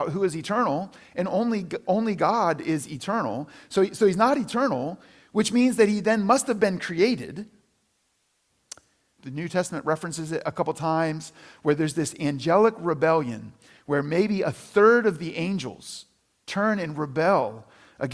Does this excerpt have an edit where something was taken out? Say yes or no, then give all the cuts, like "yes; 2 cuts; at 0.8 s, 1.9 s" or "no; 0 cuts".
yes; 1 cut; at 9.2 s